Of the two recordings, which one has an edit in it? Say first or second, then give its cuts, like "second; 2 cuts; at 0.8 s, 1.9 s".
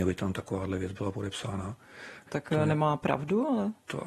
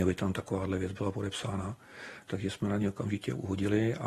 first; 1 cut; at 2.3 s